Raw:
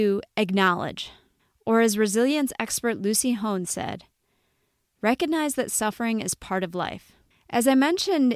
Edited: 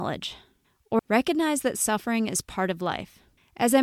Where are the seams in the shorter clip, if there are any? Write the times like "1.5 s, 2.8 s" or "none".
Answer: 1.0 s